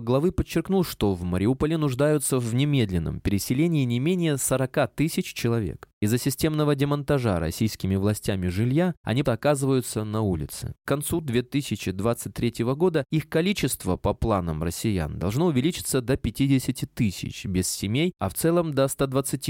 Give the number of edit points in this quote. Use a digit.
2